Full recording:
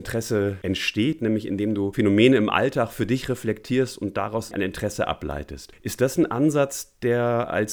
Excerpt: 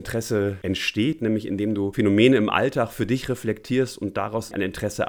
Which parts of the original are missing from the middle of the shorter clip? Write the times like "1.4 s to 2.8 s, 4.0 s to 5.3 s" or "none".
none